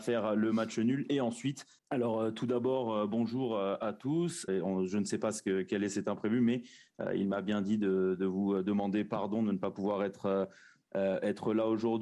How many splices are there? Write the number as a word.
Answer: two